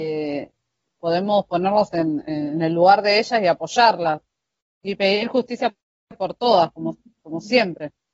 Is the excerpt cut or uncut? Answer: uncut